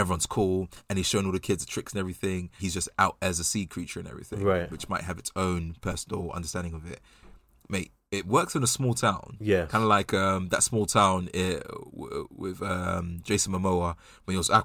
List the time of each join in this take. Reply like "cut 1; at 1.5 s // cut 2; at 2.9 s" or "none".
cut 1; at 2.6 s